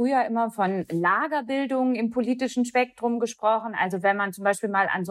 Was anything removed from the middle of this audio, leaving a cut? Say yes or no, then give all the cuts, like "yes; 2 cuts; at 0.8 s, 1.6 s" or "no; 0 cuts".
no; 0 cuts